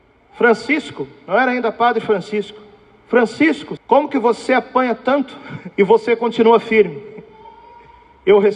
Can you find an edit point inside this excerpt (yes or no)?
yes